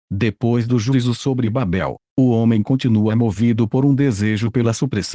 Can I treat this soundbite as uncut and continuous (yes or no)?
yes